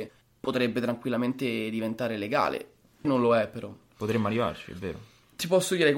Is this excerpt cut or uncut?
cut